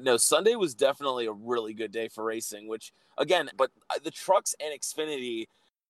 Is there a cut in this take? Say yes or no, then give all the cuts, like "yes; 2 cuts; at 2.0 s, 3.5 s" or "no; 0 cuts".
yes; 1 cut; at 3.5 s